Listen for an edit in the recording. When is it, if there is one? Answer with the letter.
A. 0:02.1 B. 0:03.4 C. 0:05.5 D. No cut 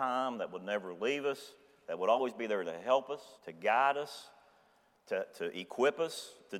B